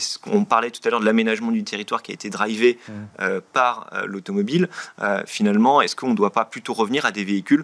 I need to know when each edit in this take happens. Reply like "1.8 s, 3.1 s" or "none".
none

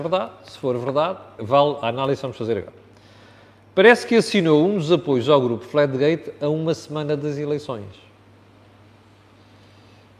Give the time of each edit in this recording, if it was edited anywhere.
1.4 s

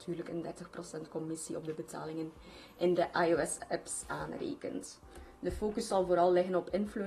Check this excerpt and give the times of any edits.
none

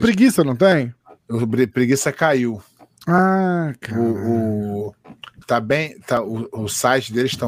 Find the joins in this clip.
5.4 s

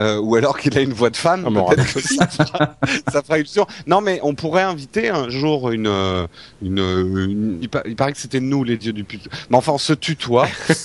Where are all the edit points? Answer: 7.6 s

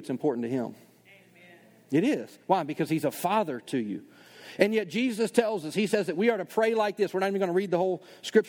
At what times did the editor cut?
none

